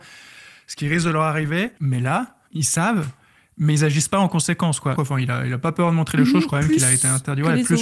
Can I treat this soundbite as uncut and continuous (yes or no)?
no